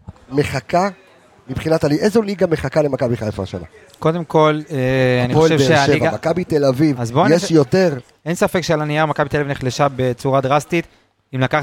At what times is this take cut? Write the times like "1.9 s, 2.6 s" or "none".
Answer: none